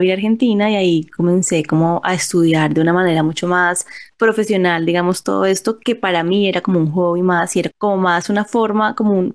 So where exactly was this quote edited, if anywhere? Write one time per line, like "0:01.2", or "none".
0:07.7